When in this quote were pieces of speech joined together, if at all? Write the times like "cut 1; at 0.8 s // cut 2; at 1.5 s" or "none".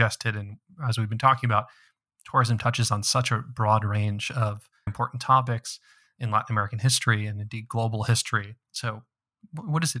cut 1; at 4.9 s // cut 2; at 8.6 s